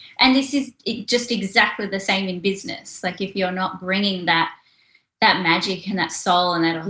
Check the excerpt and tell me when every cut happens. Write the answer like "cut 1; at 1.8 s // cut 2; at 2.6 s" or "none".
none